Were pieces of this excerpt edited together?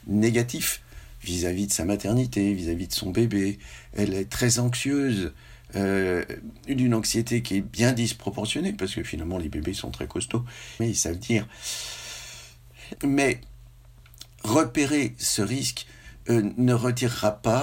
yes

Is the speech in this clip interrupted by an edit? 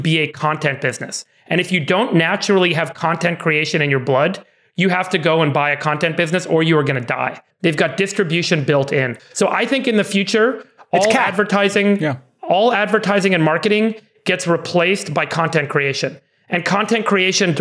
yes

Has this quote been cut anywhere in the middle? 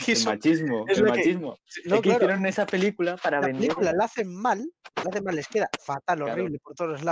no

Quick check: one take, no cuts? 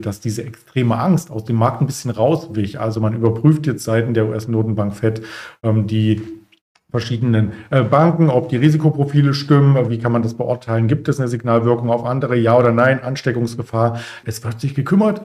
no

